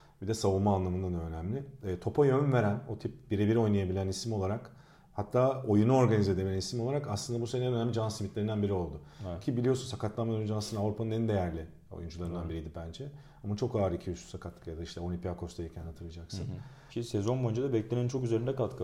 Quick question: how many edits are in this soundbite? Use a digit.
1